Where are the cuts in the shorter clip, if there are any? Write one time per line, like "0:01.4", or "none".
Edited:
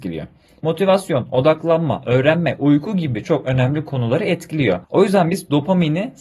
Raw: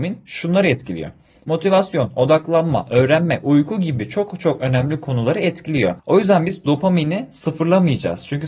0:03.2